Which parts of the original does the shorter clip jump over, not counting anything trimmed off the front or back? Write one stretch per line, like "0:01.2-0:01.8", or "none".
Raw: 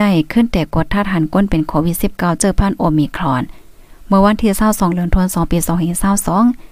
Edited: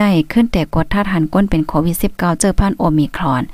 none